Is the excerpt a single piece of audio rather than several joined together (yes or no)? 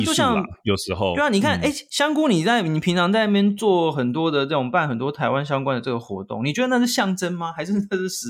yes